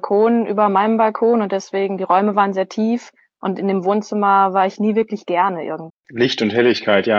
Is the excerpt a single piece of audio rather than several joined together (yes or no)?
no